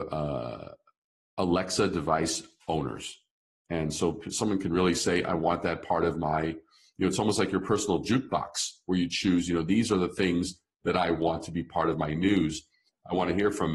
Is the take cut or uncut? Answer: cut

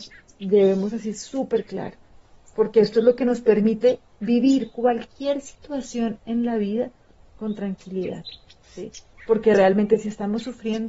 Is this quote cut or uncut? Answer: uncut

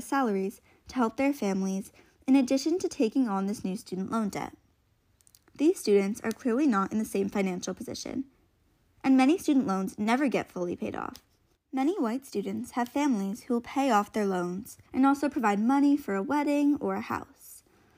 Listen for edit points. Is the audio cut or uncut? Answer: cut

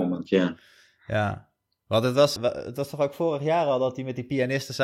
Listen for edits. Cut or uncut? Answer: cut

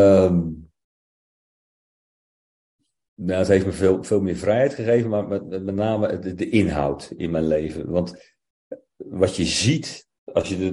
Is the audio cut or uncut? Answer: uncut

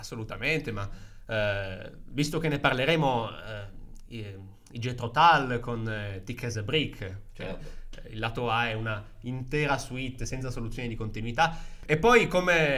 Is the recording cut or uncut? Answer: uncut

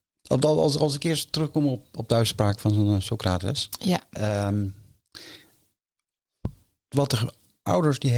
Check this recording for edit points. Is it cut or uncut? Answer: cut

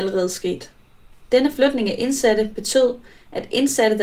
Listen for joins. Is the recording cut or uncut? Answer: cut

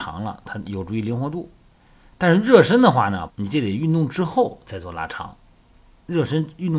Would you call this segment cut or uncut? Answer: cut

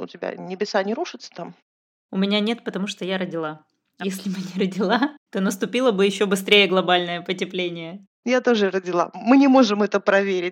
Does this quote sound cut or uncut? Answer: cut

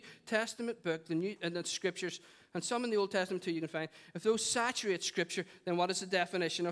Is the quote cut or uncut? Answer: uncut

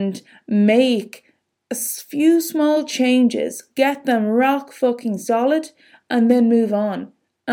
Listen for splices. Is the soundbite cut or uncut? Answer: uncut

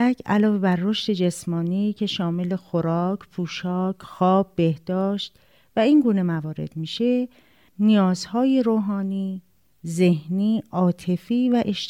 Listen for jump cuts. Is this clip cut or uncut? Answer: uncut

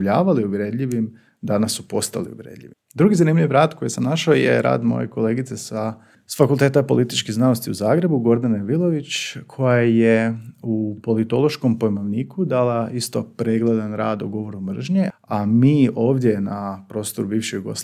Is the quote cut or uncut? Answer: cut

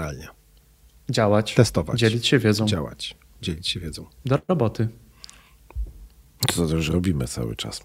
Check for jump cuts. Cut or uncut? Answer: uncut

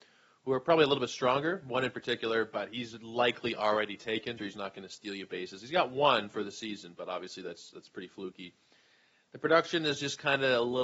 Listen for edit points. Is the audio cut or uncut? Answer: cut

